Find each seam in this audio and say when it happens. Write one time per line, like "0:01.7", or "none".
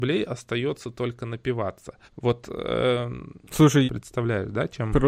0:02.1
0:03.9